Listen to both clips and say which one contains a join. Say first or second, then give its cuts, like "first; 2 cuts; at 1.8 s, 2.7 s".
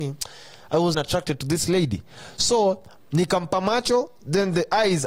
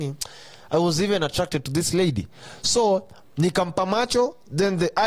first; 1 cut; at 0.9 s